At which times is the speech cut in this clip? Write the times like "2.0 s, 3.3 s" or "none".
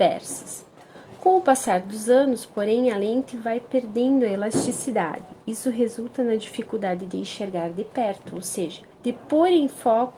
8.9 s